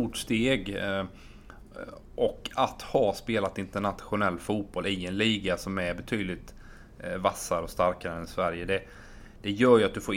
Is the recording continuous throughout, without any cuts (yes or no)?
yes